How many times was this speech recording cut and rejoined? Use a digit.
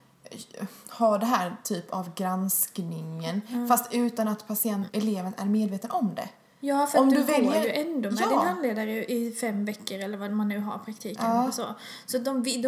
1